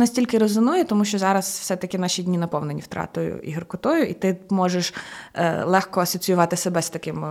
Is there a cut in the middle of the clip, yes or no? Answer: no